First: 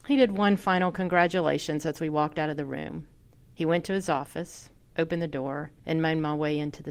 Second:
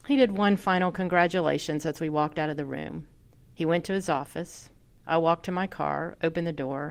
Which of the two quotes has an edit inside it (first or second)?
first